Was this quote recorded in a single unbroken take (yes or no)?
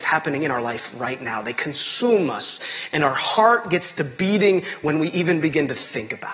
yes